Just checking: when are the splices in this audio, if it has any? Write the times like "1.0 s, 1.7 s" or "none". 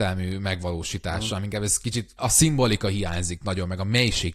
2.2 s